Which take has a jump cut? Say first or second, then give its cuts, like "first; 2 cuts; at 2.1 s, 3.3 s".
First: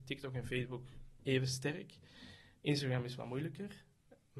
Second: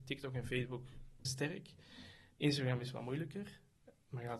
second; 1 cut; at 1.3 s